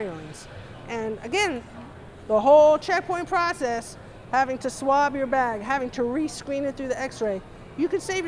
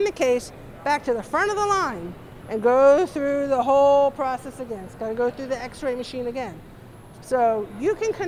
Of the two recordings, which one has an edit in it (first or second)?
second